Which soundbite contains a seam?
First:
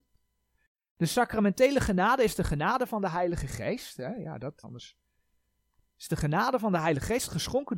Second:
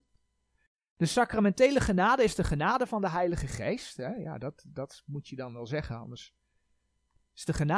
first; 1 cut; at 4.6 s

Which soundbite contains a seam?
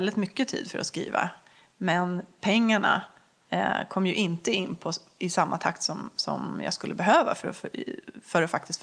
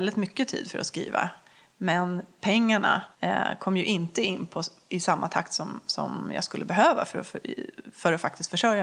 second; 1 cut; at 3.1 s

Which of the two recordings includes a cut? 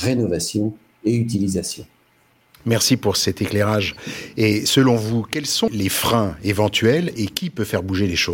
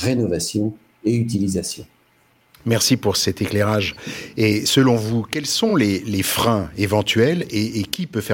first; 2 cuts; at 5.7 s, 7.2 s

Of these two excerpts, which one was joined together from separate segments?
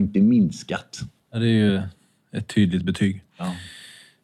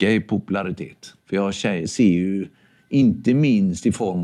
second; 1 cut; at 1.2 s

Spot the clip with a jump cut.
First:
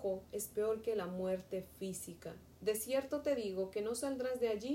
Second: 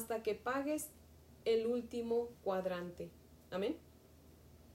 first; 1 cut; at 2.6 s

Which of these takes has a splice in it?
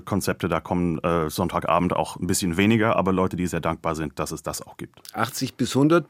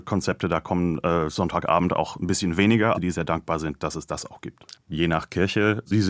second; 2 cuts; at 2.9 s, 4.7 s

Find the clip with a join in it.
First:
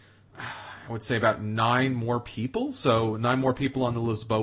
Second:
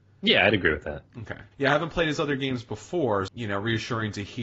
second; 2 cuts; at 1.5 s, 3.3 s

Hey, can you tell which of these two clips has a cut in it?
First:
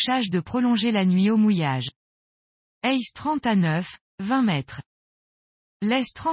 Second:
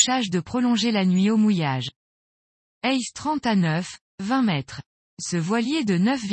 second; 1 cut; at 5.1 s

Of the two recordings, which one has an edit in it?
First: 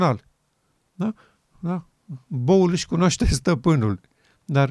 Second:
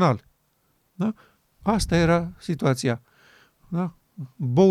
first; 1 cut; at 1.5 s

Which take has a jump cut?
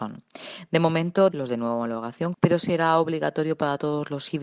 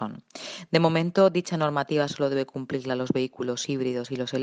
first; 2 cuts; at 1.3 s, 2.3 s

